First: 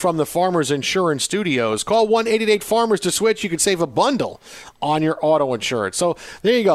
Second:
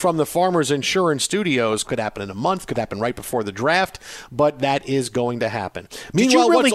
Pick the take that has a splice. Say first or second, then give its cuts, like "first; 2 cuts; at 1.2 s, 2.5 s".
second; 1 cut; at 1.8 s